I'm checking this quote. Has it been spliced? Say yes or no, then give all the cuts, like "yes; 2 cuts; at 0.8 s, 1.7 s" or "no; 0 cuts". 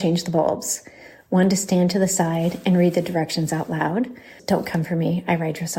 yes; 1 cut; at 4.4 s